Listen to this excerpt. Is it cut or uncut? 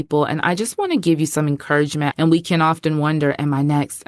cut